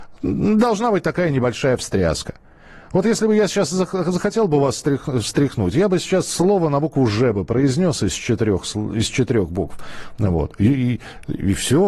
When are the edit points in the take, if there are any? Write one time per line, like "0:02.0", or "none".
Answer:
none